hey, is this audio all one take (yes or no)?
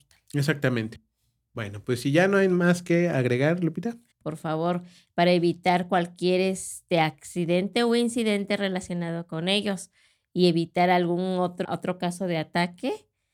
no